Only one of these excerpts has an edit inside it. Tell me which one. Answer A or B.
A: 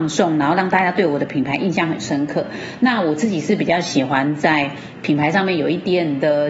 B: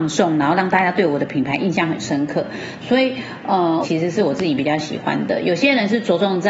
B